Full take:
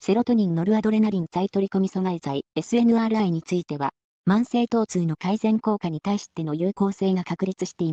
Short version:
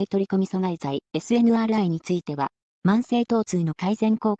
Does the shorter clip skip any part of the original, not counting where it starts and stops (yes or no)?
no